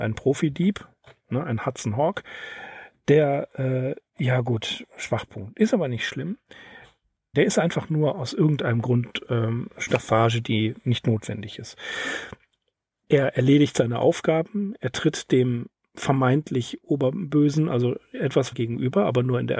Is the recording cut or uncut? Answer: cut